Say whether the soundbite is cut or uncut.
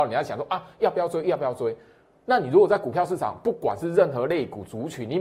uncut